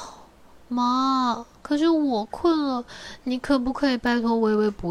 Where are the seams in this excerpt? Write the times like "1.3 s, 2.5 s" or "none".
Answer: none